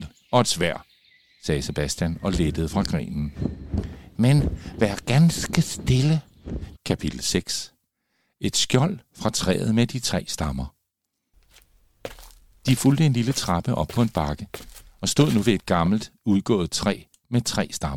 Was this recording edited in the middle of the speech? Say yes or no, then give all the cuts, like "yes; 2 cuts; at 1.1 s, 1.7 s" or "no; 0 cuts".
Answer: yes; 1 cut; at 6.8 s